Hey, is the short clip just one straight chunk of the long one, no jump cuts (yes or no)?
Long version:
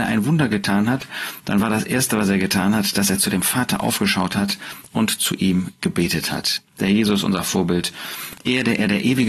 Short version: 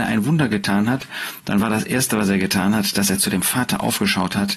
yes